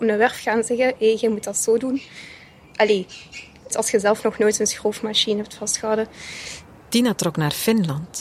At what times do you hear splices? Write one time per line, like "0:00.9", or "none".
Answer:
0:03.7